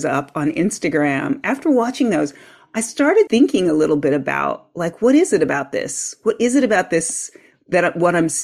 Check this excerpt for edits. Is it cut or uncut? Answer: cut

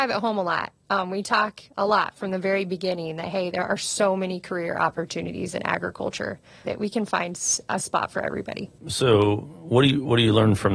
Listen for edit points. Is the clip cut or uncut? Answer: cut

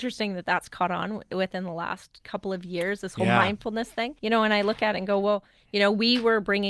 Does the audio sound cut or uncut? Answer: cut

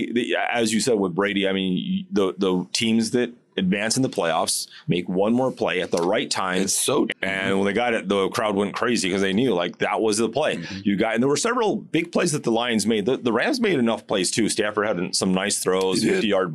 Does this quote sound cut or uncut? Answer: cut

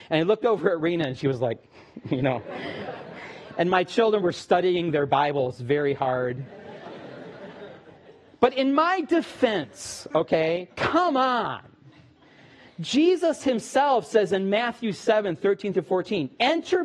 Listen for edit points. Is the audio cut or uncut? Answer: uncut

